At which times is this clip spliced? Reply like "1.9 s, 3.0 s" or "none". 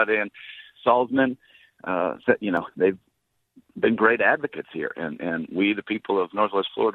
none